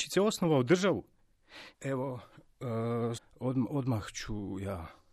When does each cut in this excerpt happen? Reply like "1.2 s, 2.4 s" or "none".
1.7 s, 3.2 s